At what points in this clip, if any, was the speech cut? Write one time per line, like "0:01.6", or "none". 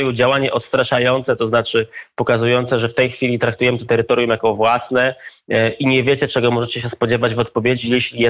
none